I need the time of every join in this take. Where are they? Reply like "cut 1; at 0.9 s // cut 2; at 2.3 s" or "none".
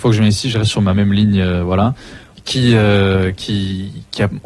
cut 1; at 2.3 s